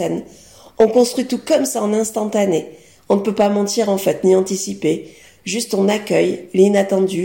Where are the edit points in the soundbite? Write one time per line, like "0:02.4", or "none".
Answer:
none